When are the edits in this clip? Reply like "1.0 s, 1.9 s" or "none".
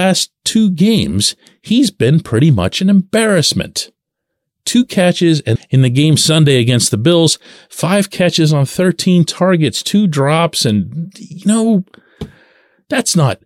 5.6 s